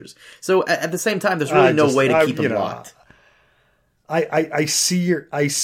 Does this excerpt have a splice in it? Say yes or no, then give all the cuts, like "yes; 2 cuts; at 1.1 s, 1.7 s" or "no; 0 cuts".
no; 0 cuts